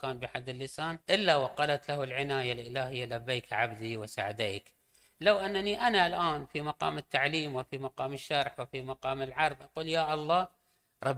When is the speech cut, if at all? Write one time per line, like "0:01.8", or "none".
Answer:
0:01.0

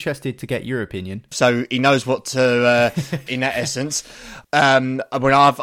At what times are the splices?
0:01.3
0:03.3
0:04.4

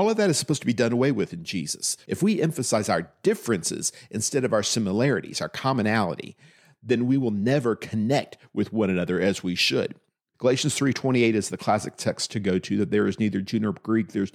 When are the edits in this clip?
0:02.1
0:10.3

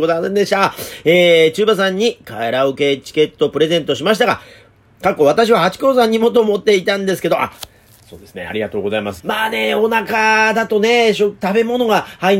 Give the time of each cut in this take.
0:09.2

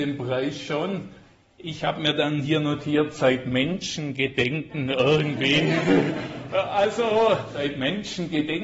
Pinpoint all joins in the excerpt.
none

